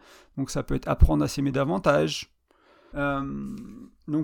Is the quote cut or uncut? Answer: cut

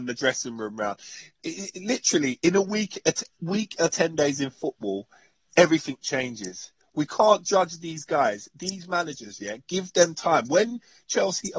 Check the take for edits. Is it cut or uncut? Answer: uncut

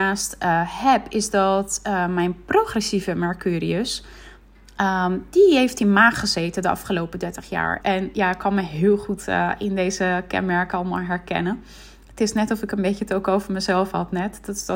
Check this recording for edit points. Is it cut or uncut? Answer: cut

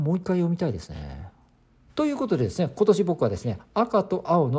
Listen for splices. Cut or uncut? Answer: cut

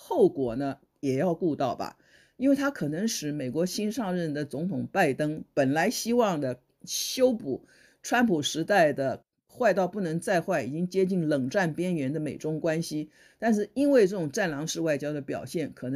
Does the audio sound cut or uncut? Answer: uncut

